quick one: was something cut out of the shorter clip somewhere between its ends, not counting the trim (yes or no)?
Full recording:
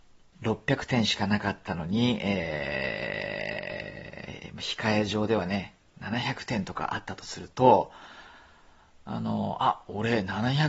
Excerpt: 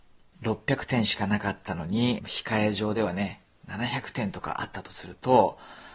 yes